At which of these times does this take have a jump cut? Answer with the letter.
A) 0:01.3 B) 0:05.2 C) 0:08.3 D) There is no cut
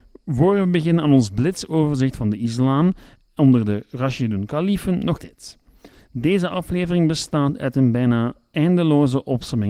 B